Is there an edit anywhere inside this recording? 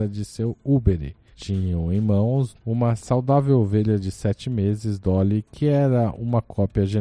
yes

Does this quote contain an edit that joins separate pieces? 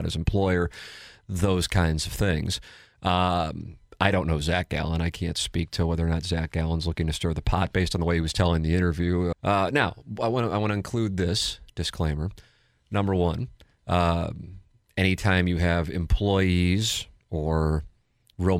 yes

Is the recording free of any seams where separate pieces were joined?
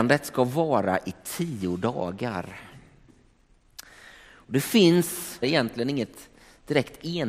no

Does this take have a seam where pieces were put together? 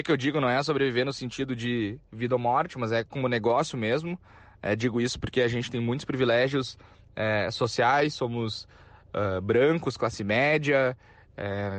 no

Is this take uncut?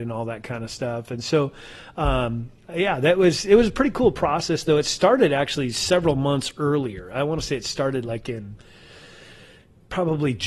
yes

